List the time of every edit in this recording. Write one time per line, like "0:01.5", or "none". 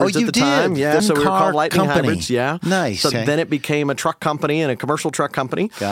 0:01.0
0:03.1